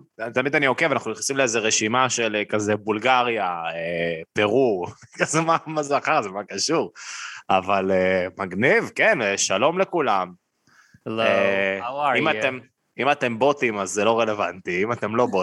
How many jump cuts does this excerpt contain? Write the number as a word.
zero